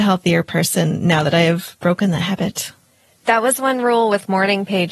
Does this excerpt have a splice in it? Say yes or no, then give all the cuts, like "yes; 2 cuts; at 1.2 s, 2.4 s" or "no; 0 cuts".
no; 0 cuts